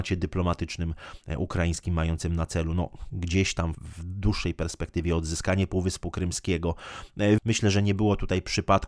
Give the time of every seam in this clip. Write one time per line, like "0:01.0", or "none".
0:03.7
0:07.4